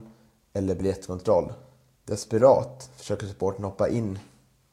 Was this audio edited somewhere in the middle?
yes; 1 cut; at 2.0 s

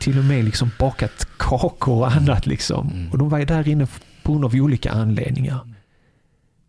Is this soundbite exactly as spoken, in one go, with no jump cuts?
yes; 0 cuts

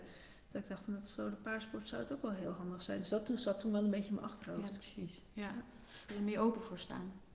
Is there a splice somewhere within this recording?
yes; 1 cut; at 6.1 s

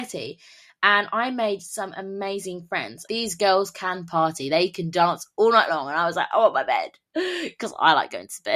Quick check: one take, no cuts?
no; 1 cut; at 3.1 s

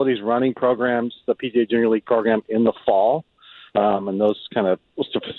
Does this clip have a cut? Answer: no; 0 cuts

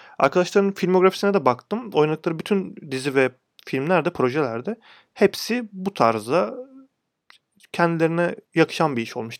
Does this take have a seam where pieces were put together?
yes; 1 cut; at 8.5 s

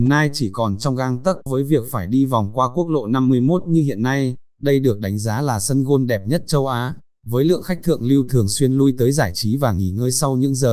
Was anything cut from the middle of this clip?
yes; 2 cuts; at 1.5 s, 4.5 s

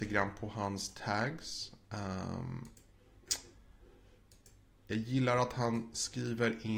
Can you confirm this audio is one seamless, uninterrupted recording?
yes; 0 cuts

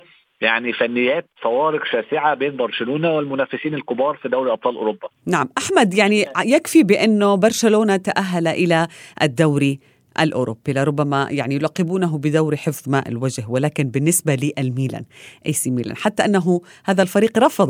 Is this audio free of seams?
no; 1 cut; at 1.3 s

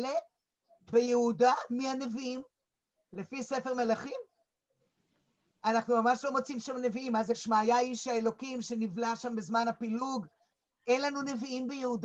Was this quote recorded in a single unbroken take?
yes; 0 cuts

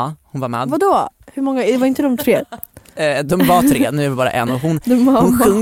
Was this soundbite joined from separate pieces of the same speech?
no; 0 cuts

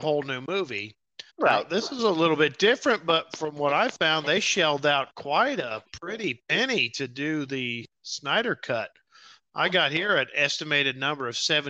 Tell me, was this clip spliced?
yes; 1 cut; at 1.3 s

